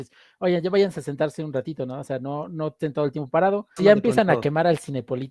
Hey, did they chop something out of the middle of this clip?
yes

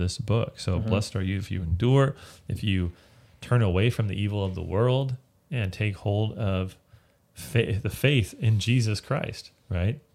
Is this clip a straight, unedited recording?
yes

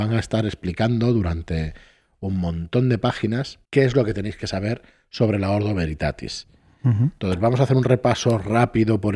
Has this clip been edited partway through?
yes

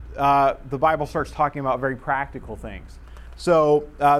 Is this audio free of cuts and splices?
yes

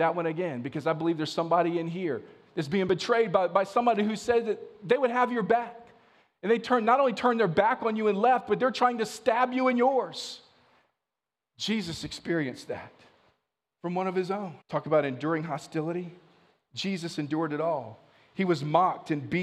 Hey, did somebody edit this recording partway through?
yes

